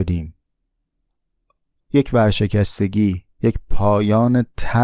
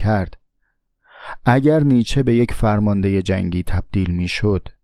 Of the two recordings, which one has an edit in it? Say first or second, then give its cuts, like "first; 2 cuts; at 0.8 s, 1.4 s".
first; 2 cuts; at 1.8 s, 3.3 s